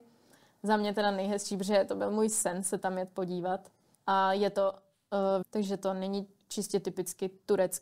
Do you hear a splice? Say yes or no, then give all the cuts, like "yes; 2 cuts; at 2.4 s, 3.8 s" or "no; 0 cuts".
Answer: yes; 2 cuts; at 3.9 s, 5.4 s